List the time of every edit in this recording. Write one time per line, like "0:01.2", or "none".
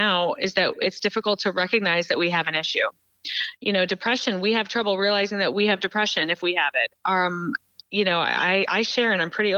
none

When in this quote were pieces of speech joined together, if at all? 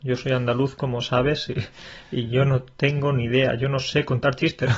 none

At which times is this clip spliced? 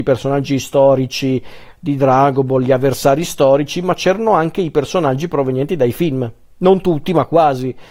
none

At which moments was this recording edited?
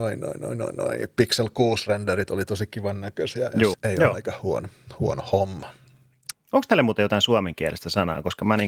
0:03.7
0:06.3

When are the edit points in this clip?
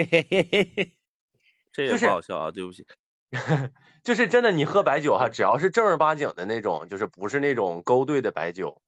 none

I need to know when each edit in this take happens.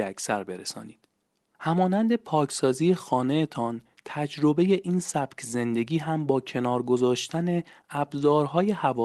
none

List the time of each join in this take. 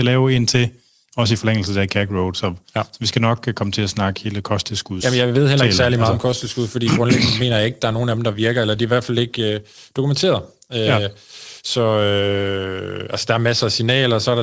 none

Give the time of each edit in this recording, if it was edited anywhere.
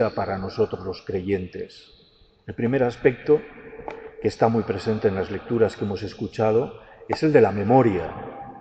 none

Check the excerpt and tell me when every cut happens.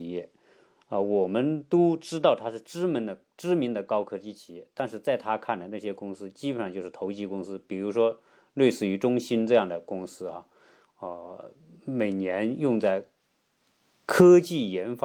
none

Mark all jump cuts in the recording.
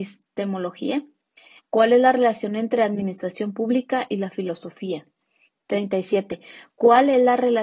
0:01.6
0:05.5

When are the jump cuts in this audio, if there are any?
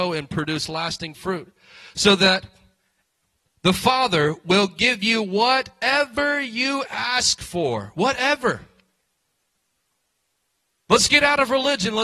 none

